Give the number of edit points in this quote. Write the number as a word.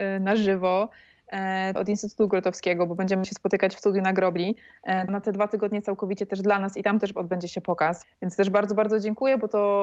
three